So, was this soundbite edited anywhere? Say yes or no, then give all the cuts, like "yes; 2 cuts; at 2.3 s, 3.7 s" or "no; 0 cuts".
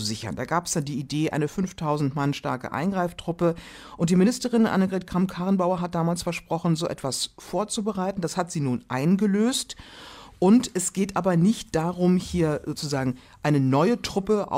no; 0 cuts